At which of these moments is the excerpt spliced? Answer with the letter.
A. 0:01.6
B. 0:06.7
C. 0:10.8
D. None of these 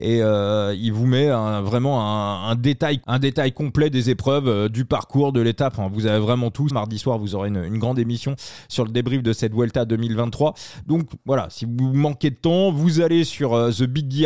B